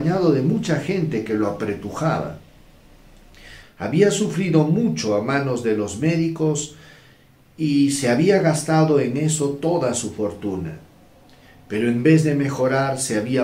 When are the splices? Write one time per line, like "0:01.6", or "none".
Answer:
0:03.6

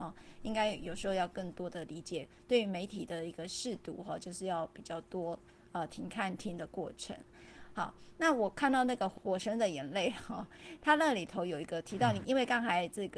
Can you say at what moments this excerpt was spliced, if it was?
none

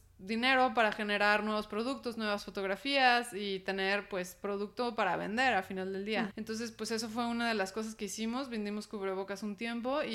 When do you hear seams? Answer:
0:06.3

